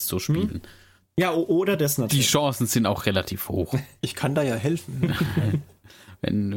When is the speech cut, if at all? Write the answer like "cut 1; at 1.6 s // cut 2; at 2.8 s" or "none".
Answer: cut 1; at 1.1 s